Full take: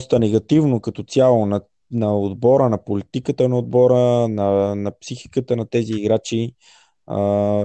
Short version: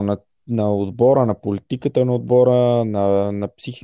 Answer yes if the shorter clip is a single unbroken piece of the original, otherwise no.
yes